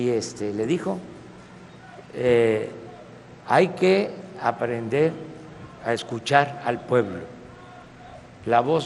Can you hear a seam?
no; 0 cuts

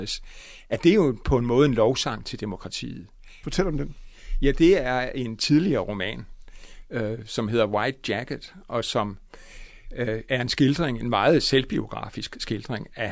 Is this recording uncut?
no; 1 cut; at 3.4 s

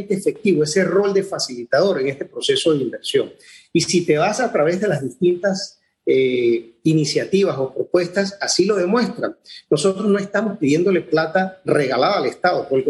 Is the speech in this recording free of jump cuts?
yes; 0 cuts

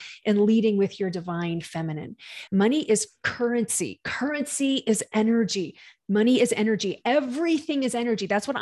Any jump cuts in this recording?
yes; 1 cut; at 2.5 s

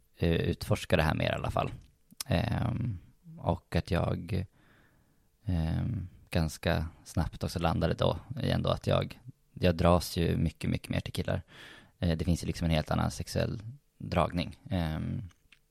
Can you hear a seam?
no; 0 cuts

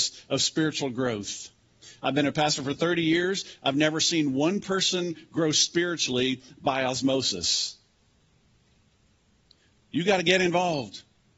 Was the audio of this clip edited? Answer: no; 0 cuts

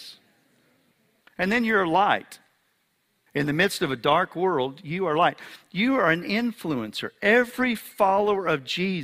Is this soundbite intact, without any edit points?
yes; 0 cuts

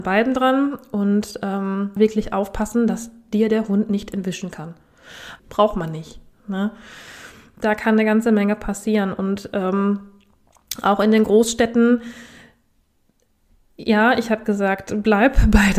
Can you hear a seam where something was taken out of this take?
yes; 2 cuts; at 2.0 s, 5.4 s

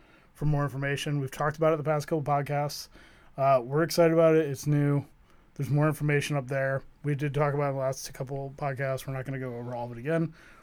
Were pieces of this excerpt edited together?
no; 0 cuts

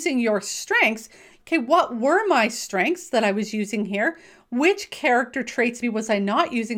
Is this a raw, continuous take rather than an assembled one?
no; 2 cuts; at 1.4 s, 5.8 s

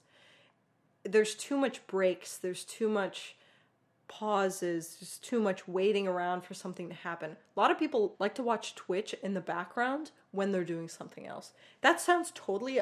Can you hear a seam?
yes; 1 cut; at 8.1 s

